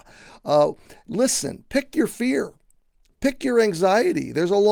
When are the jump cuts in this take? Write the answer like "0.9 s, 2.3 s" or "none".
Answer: none